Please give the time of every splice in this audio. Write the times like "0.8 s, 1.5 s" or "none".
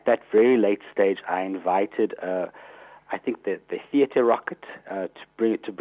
none